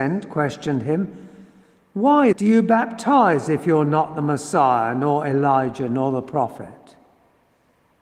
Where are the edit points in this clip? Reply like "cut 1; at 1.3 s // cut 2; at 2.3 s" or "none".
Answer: cut 1; at 2.3 s

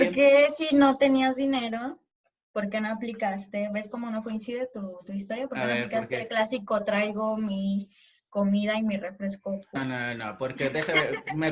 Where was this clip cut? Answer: cut 1; at 9.7 s

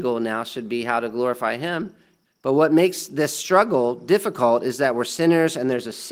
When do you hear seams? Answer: cut 1; at 2.2 s

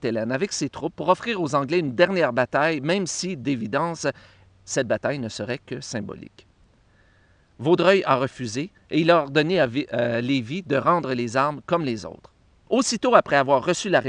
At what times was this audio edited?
cut 1; at 12.7 s

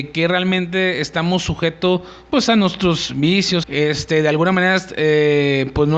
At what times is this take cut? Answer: cut 1; at 3.6 s

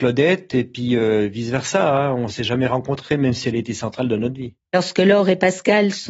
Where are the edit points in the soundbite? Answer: cut 1; at 4.7 s

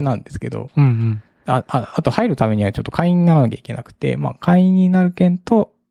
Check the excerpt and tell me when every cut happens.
none

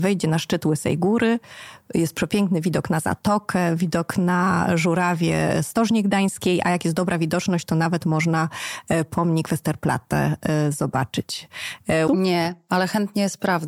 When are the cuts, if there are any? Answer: cut 1; at 12.1 s

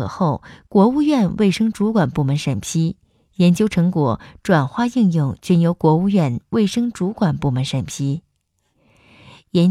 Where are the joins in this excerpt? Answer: none

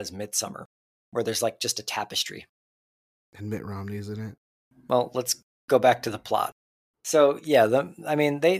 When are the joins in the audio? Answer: cut 1; at 6.9 s

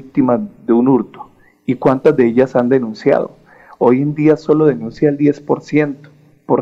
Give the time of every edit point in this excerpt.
none

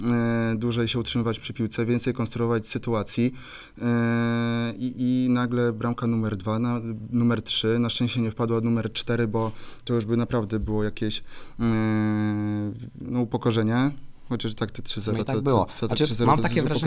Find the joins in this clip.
none

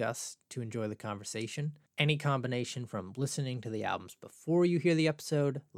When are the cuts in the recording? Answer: cut 1; at 1.9 s

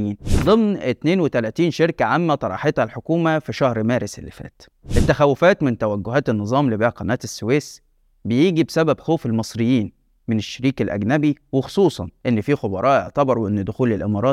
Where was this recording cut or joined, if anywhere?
none

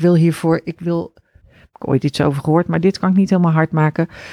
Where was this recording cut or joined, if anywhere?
cut 1; at 1.4 s

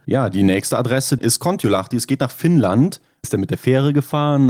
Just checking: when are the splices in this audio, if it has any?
cut 1; at 1.2 s // cut 2; at 3.2 s

